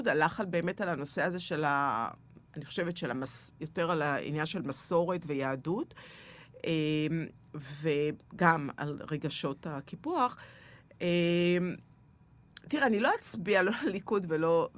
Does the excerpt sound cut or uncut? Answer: uncut